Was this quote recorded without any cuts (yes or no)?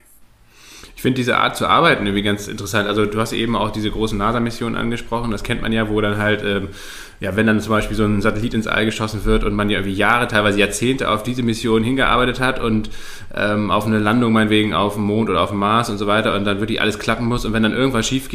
yes